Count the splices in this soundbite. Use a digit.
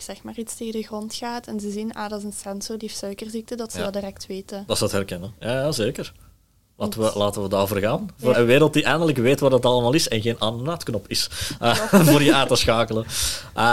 1